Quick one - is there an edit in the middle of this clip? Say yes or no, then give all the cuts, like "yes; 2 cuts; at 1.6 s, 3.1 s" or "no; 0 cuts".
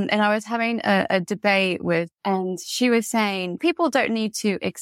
yes; 2 cuts; at 2.1 s, 3.6 s